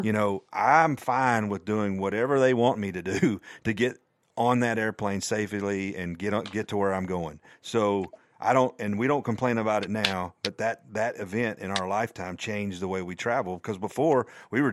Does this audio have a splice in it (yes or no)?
no